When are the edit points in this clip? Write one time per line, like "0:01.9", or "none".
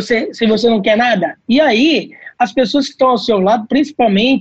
0:01.4

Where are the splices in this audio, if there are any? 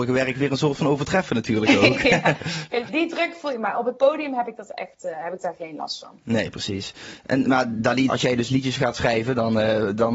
0:02.9
0:08.1

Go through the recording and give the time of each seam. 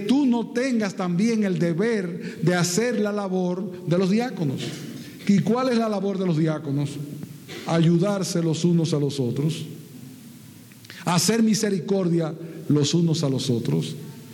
none

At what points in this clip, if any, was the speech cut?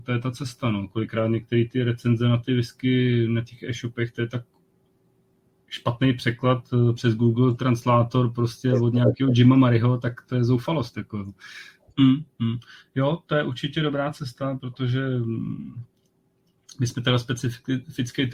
0:11.9

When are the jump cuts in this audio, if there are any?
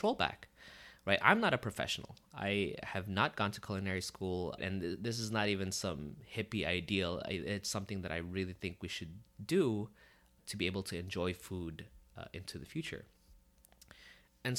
0:04.6

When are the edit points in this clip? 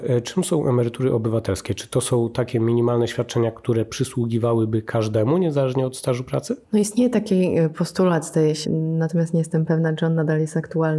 0:06.6
0:08.6

